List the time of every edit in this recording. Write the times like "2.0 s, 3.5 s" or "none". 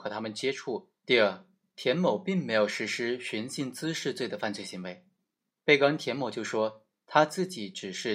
1.0 s, 5.5 s